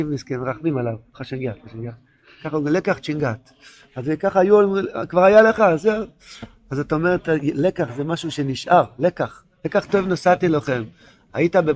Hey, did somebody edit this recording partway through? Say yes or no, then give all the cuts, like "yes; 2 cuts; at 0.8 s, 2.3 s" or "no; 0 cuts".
no; 0 cuts